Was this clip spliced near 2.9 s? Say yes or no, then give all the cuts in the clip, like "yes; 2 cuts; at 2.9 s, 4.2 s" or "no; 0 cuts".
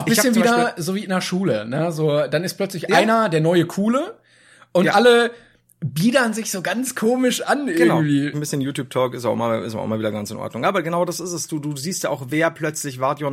no; 1 cut; at 8.3 s